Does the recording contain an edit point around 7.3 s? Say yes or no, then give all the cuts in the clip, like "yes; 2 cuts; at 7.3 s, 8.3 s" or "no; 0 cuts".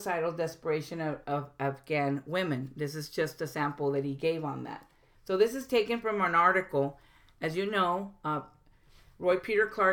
no; 1 cut; at 5.1 s